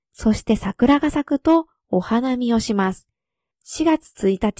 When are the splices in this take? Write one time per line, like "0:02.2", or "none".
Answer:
0:03.5